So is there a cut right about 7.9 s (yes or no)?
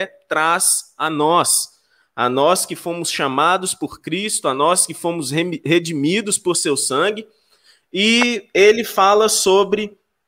no